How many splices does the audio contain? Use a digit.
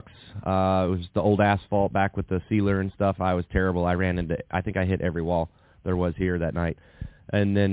0